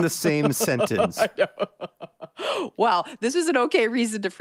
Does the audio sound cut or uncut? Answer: uncut